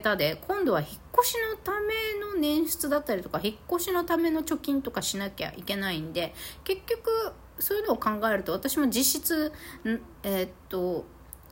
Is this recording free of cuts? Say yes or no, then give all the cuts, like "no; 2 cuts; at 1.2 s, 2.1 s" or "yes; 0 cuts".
no; 1 cut; at 10.1 s